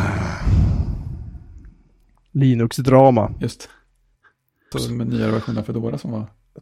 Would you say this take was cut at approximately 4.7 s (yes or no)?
yes